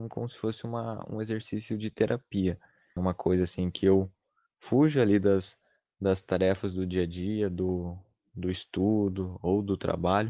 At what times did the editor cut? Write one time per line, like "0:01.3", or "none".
0:03.0